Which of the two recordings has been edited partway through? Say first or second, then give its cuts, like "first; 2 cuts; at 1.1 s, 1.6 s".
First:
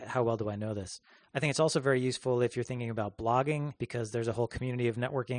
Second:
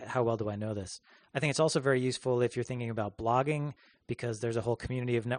first; 1 cut; at 3.8 s